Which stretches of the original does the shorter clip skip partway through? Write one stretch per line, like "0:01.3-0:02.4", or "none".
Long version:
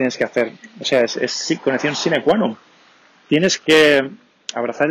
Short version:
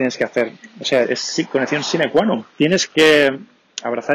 0:01.0-0:01.1
0:02.6-0:03.2